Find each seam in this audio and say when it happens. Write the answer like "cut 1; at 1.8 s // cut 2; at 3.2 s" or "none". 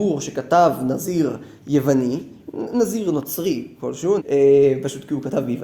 cut 1; at 2.4 s // cut 2; at 4.2 s